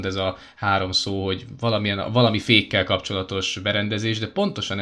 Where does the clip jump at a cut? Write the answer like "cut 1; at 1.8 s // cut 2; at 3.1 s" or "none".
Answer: none